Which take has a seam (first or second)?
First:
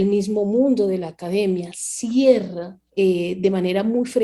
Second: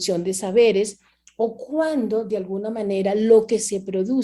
first